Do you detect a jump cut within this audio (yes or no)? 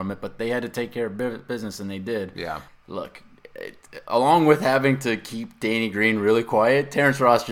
yes